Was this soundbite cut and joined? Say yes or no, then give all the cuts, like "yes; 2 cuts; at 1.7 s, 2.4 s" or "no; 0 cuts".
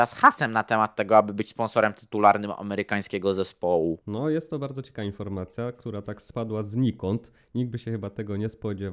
no; 0 cuts